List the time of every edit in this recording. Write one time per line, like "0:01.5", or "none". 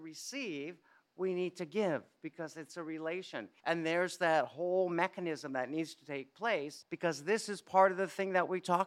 0:03.6
0:06.8